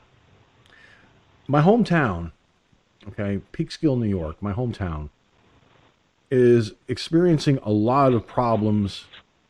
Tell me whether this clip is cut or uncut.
uncut